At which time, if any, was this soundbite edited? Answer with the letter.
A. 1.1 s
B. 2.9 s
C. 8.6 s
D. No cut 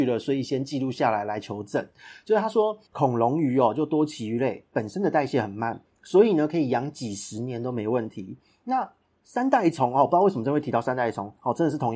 B